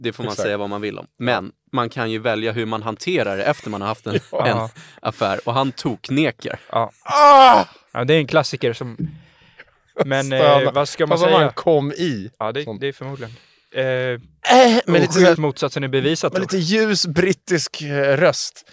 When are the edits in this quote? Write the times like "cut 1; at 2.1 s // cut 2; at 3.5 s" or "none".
cut 1; at 15.4 s